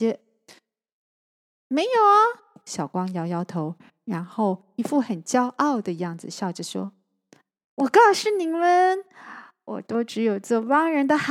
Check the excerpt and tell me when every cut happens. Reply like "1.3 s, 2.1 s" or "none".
none